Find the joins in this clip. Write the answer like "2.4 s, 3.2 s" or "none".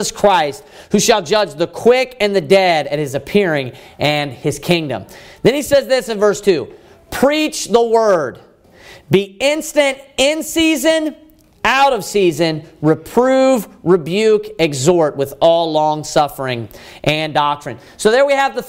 none